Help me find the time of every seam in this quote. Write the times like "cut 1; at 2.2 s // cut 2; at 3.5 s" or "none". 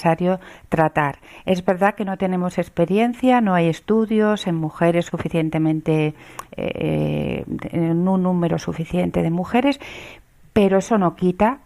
none